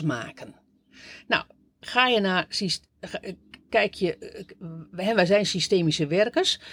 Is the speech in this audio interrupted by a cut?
no; 0 cuts

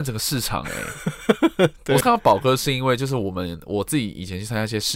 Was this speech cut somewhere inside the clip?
yes; 1 cut; at 2.0 s

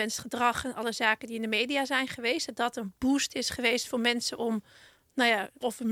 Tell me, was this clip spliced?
no; 0 cuts

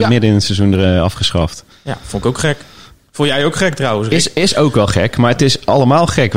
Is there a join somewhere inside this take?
no; 0 cuts

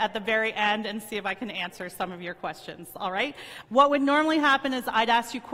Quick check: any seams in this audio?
yes; 1 cut; at 3.6 s

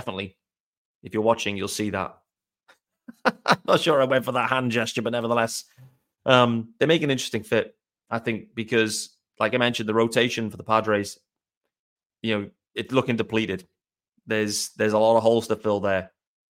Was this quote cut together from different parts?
no; 0 cuts

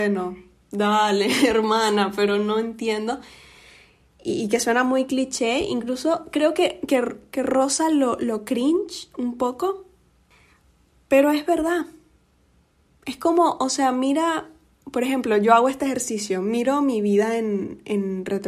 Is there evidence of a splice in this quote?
no; 0 cuts

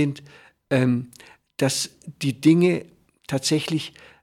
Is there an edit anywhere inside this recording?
no; 0 cuts

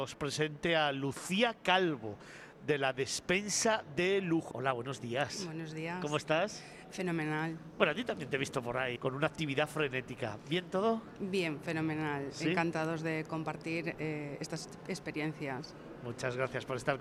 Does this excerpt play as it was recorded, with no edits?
no; 2 cuts; at 4.5 s, 9.0 s

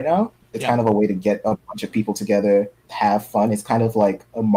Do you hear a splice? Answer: yes; 1 cut; at 2.9 s

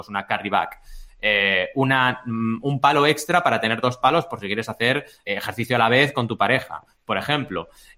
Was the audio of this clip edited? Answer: yes; 1 cut; at 5.3 s

